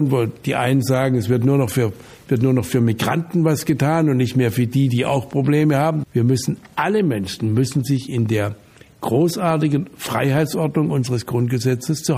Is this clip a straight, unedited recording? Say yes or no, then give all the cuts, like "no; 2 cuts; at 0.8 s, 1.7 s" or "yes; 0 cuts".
no; 1 cut; at 6.0 s